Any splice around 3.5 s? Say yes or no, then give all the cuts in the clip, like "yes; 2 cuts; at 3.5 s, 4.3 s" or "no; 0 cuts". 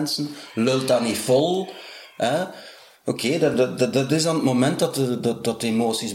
no; 0 cuts